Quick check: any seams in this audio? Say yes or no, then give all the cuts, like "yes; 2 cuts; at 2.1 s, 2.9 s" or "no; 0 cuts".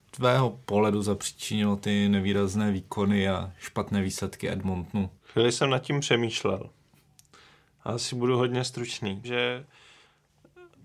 yes; 2 cuts; at 5.2 s, 9.2 s